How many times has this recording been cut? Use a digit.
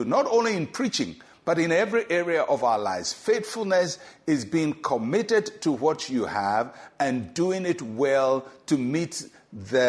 0